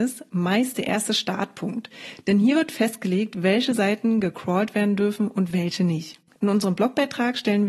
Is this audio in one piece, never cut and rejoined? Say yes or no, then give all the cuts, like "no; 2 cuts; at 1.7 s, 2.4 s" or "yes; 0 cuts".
yes; 0 cuts